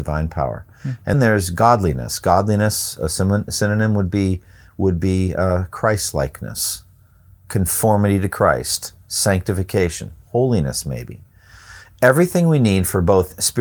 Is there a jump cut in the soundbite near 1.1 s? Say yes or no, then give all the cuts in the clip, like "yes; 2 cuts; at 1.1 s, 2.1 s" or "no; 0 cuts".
yes; 1 cut; at 1.1 s